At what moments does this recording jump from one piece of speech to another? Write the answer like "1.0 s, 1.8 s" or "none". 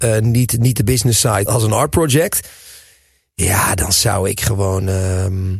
1.5 s